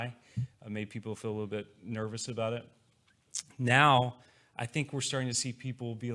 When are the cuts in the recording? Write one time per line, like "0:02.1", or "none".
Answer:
none